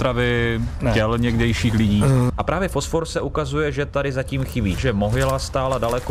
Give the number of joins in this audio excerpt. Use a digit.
2